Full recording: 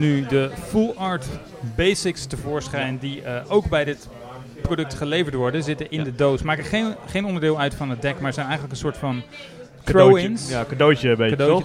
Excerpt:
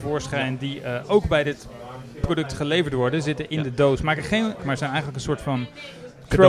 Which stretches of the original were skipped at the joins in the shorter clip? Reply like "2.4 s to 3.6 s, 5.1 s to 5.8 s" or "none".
7.0 s to 8.2 s